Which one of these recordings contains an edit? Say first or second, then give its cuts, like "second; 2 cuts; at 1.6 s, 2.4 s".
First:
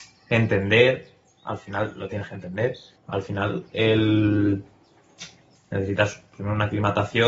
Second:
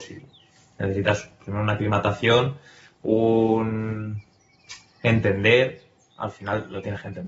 first; 2 cuts; at 3.0 s, 5.5 s